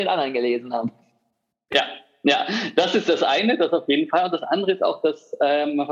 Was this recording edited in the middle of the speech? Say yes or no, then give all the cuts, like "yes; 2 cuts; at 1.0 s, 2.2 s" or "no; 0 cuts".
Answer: no; 0 cuts